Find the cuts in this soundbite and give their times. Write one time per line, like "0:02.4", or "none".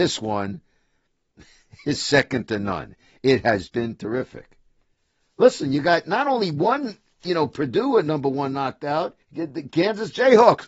0:03.7
0:09.2